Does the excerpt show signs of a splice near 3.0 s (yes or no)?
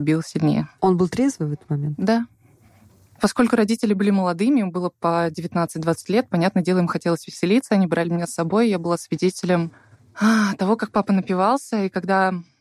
no